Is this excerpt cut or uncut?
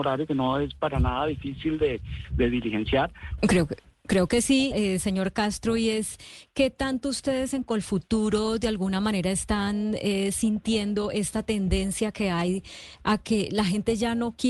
cut